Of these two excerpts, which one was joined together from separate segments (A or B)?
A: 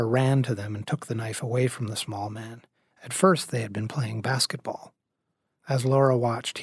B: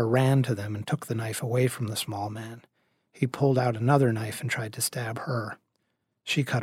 A